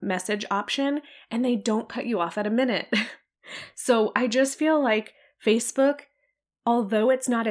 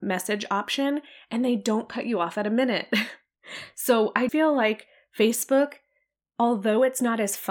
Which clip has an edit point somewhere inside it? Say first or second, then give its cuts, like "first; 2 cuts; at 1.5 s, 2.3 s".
second; 1 cut; at 4.3 s